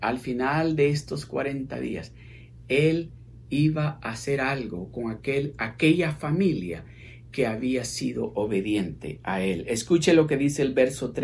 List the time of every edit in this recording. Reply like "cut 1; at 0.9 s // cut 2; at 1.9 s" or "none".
none